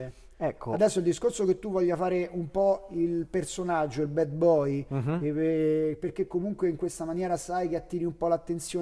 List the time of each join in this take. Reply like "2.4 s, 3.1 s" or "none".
none